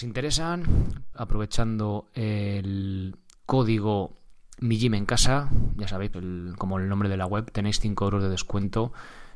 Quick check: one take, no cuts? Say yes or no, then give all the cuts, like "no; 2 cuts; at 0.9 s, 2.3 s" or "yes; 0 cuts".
no; 2 cuts; at 1.1 s, 6.1 s